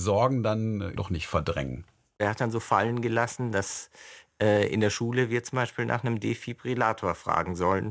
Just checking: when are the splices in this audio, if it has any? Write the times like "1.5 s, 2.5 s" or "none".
1.0 s